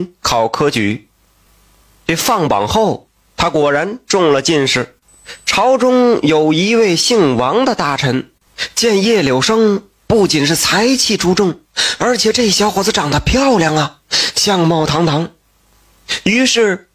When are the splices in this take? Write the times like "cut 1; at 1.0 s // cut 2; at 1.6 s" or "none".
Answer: none